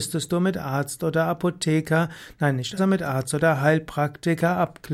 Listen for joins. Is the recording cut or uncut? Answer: cut